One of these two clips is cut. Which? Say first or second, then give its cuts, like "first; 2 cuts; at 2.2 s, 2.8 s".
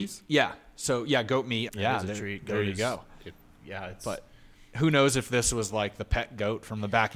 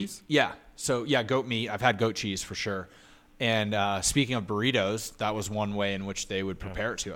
first; 1 cut; at 1.7 s